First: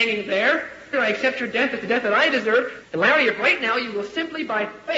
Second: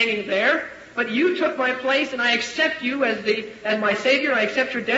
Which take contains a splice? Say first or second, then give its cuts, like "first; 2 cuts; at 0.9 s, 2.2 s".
first; 2 cuts; at 0.9 s, 2.8 s